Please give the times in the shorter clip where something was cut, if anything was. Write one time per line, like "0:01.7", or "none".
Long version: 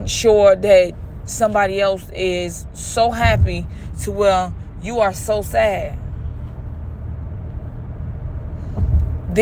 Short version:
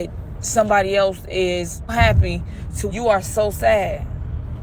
0:01.9
0:02.9